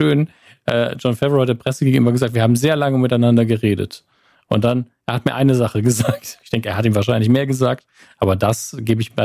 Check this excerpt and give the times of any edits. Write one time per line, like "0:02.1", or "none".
none